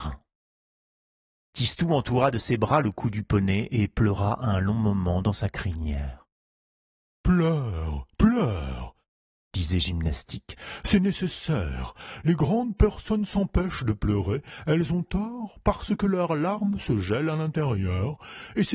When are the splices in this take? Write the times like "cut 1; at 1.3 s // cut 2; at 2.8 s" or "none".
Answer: cut 1; at 8.1 s